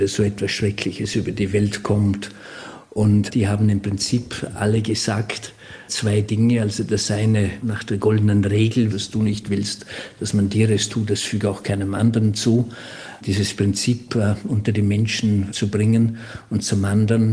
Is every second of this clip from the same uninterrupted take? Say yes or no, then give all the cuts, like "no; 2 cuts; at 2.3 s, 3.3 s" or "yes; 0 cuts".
no; 1 cut; at 8.9 s